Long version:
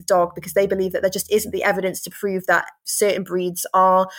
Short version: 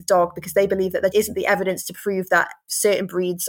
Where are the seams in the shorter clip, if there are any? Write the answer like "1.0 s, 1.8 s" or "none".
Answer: 1.1 s